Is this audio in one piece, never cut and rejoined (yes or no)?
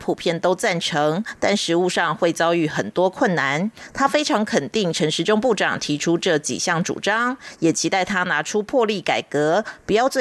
yes